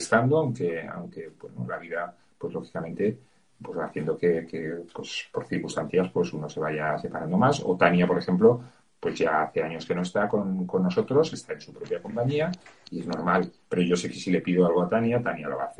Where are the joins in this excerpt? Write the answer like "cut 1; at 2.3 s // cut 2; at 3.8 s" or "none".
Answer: none